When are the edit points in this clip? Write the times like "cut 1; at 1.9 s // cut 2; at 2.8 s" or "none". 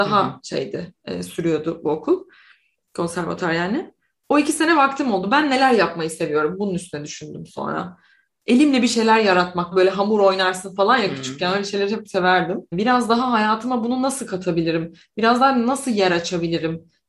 cut 1; at 9.7 s // cut 2; at 12.7 s